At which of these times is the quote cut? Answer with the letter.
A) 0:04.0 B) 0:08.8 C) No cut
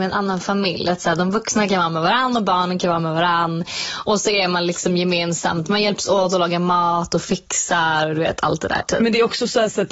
B